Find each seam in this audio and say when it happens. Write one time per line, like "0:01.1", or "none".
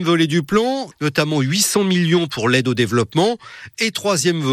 0:00.9